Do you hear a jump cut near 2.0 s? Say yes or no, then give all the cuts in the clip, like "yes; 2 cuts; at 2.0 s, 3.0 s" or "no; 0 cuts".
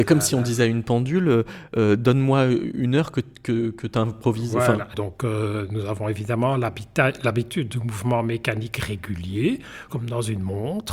no; 2 cuts; at 4.9 s, 9.9 s